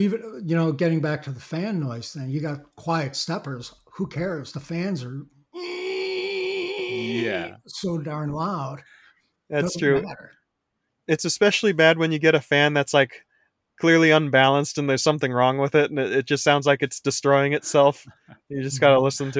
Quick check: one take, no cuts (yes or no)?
yes